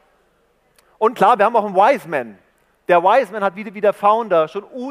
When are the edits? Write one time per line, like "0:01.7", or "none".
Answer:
none